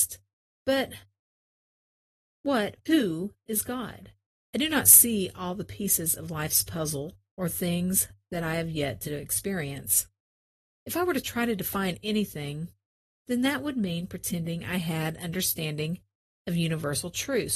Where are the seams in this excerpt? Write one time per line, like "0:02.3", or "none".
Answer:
0:02.8
0:04.4